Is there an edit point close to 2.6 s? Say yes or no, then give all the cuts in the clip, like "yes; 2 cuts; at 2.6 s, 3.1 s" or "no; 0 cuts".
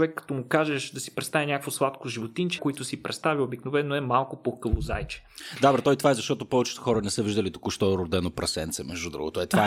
yes; 1 cut; at 2.6 s